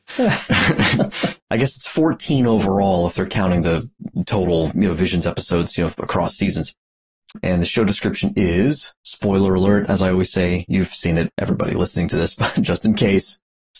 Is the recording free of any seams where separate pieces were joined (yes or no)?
no